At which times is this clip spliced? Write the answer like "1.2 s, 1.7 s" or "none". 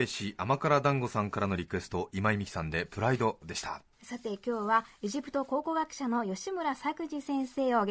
3.9 s